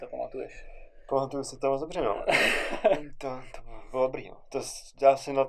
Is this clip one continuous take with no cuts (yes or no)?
yes